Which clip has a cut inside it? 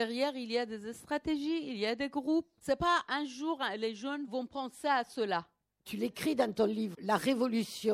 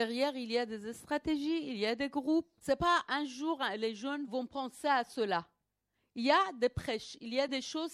first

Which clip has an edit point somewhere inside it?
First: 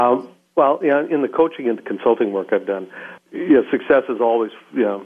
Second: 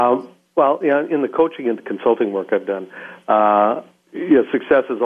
first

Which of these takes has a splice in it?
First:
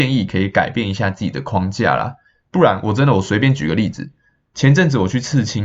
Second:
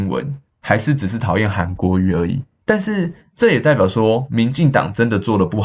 second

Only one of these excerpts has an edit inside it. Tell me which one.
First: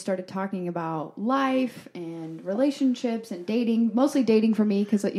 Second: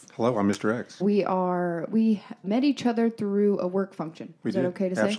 second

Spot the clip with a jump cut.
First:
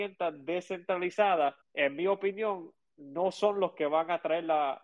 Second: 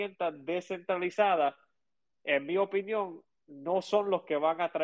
first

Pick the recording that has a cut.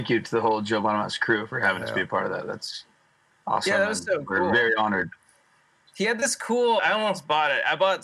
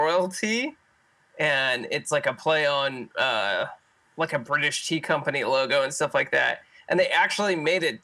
first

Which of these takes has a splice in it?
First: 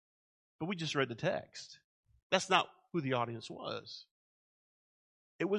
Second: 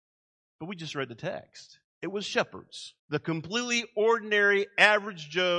second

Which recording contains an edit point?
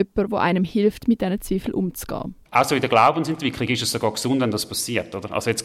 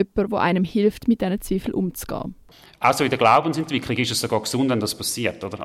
first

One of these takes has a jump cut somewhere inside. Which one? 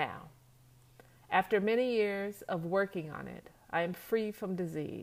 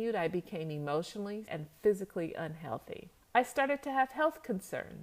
second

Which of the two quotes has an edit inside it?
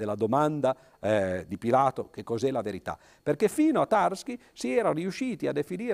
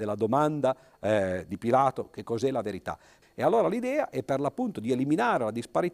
second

